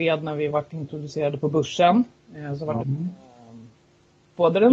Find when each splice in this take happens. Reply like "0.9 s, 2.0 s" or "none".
2.8 s